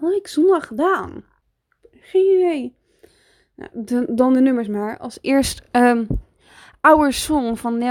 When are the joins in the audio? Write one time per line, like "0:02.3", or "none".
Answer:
none